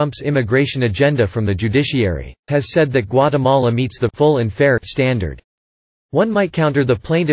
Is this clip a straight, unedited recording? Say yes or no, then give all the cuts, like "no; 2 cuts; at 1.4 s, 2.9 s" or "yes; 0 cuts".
no; 1 cut; at 2.5 s